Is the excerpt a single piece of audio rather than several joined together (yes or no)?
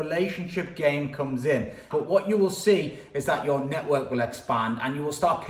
no